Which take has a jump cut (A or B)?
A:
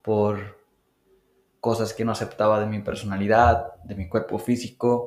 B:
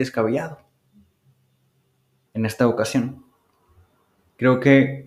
B